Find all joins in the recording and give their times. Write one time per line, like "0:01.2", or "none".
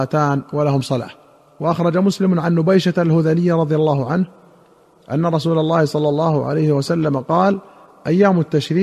none